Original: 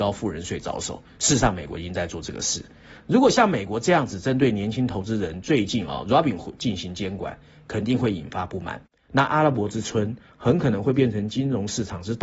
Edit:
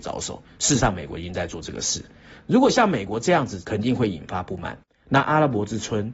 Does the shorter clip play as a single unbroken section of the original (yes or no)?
no